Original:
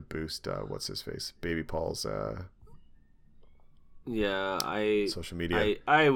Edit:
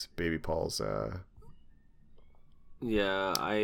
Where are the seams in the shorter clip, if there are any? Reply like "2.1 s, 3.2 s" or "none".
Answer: none